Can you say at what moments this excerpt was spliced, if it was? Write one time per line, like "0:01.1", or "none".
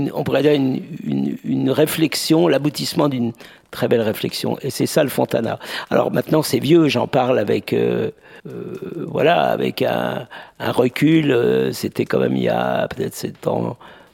0:08.4